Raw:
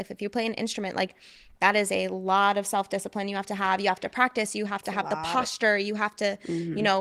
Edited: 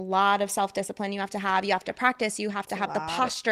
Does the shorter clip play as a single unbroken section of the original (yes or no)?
yes